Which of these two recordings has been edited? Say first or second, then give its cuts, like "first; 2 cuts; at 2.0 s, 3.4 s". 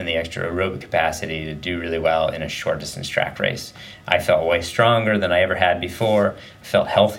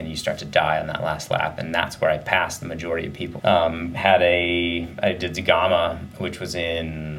second; 1 cut; at 3.4 s